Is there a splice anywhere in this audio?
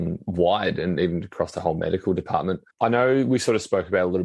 yes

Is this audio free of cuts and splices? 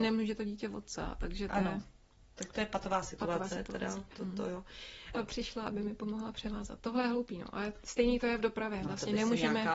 no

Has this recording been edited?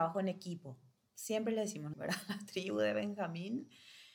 yes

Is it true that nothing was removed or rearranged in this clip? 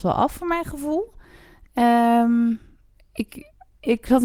yes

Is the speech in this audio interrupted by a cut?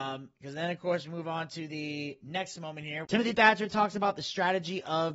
yes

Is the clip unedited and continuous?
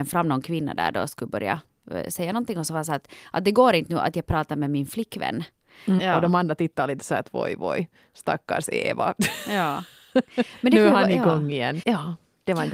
no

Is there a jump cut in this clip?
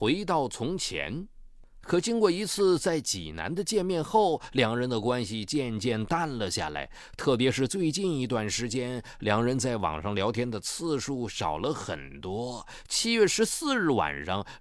yes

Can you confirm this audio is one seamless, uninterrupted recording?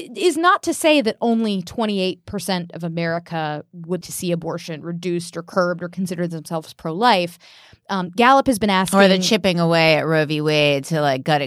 no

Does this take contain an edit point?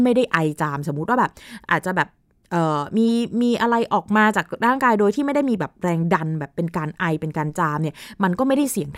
no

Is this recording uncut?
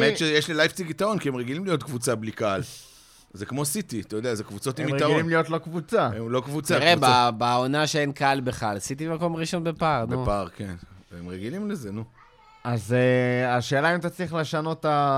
yes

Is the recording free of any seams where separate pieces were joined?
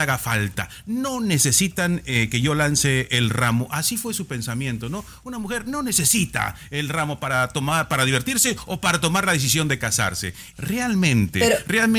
no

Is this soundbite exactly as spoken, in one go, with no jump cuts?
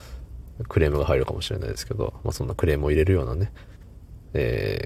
yes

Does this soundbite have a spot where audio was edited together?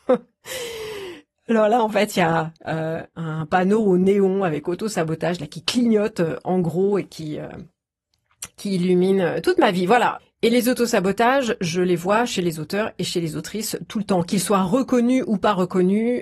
yes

